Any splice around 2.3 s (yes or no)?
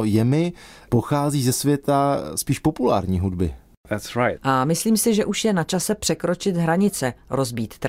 no